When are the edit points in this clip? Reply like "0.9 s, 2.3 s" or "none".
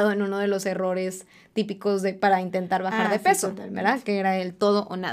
none